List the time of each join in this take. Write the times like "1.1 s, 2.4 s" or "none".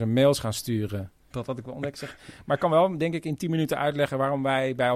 1.3 s